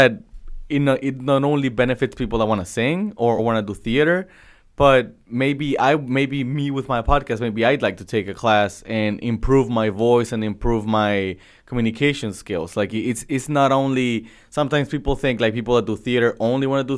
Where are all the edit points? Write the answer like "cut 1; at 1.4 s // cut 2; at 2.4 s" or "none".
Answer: none